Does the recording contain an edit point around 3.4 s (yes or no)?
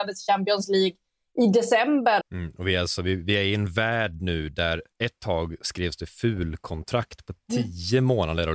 no